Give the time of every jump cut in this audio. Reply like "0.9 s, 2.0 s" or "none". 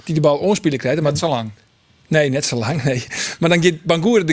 none